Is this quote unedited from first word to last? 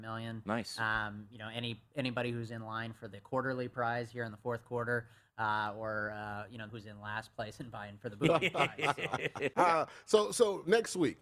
no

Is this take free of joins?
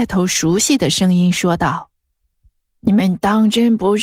yes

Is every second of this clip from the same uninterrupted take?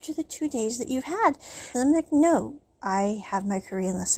no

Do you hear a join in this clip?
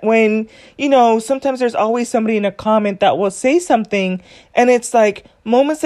no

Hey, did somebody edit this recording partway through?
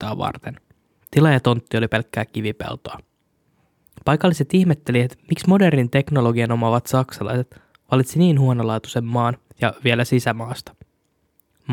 yes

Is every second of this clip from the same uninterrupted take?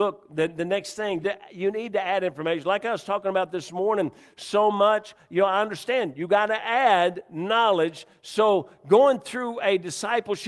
no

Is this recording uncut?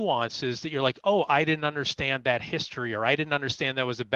yes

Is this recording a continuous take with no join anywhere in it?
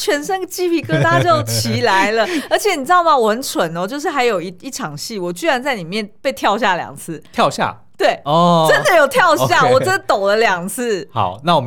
yes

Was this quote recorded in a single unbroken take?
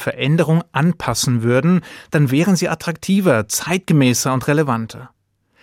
yes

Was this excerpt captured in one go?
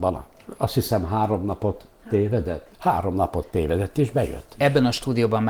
no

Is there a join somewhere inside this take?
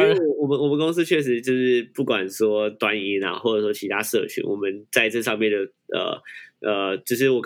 no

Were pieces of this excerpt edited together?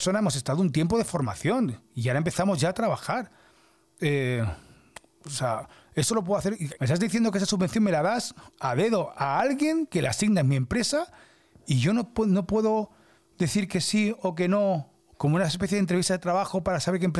yes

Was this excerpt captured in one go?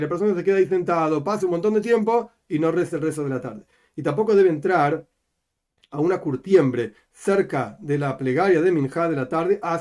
yes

